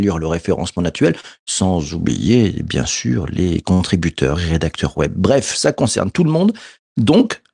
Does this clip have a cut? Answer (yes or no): no